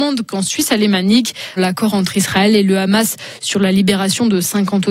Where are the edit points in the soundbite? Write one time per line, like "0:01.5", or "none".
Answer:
0:01.6